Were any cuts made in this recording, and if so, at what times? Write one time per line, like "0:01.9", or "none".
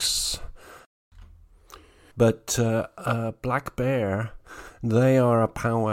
0:02.1